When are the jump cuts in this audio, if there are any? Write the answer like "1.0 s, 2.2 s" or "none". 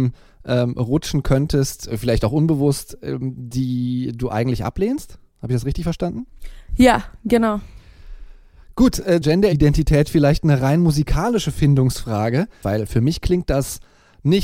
9.2 s, 12.6 s